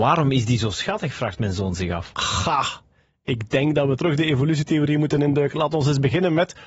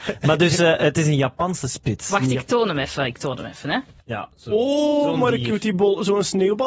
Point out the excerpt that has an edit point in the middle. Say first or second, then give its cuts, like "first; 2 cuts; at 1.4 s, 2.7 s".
second; 1 cut; at 4.0 s